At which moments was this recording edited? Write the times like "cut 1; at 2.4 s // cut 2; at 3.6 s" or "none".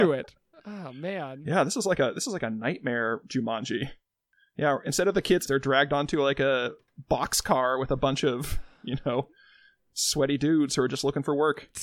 cut 1; at 5.5 s